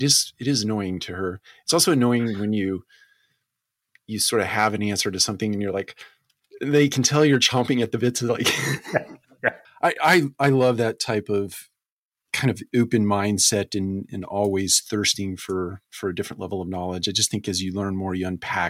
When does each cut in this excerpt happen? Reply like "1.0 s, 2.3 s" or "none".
9.6 s